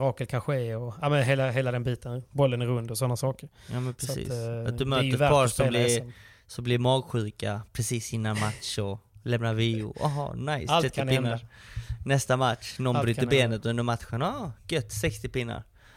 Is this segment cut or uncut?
uncut